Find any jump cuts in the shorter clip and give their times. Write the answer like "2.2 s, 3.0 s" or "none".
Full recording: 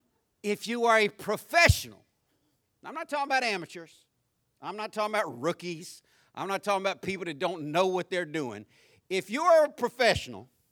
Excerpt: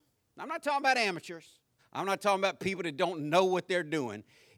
1.8 s